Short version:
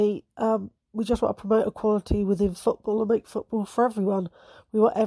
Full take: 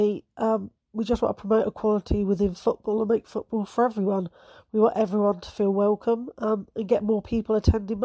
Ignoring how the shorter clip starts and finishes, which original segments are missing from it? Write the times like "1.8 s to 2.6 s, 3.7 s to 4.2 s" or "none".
none